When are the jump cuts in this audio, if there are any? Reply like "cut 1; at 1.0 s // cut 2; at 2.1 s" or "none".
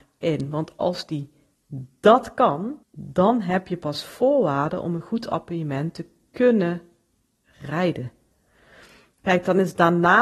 cut 1; at 2.8 s